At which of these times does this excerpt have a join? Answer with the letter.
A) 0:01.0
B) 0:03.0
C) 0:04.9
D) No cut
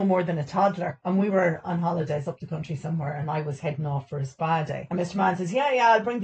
D